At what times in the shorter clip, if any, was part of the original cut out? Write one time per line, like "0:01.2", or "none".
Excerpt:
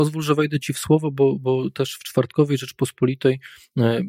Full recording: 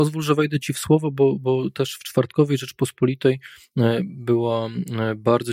none